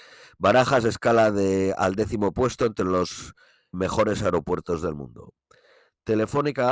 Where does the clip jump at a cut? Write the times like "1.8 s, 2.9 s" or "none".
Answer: 3.7 s

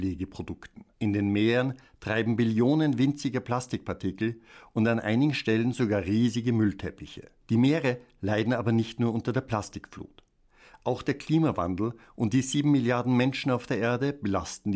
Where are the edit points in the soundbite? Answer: 0.9 s, 7.4 s

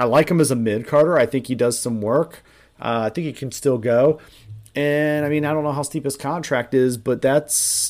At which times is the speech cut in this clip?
none

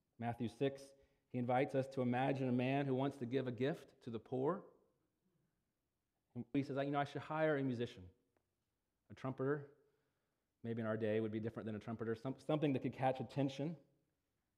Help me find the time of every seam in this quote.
6.5 s

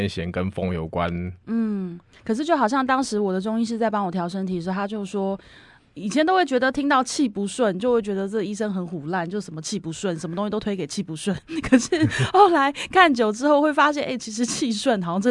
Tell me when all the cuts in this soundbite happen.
none

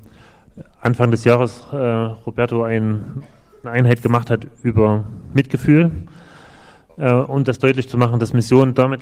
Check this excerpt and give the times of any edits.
none

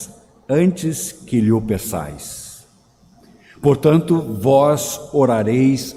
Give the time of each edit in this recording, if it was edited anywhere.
none

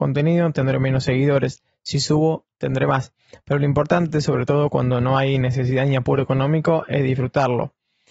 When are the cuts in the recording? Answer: none

